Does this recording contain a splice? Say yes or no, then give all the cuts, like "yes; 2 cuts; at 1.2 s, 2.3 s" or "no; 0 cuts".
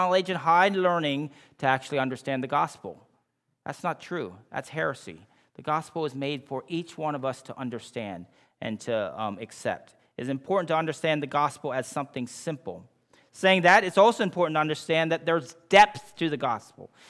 no; 0 cuts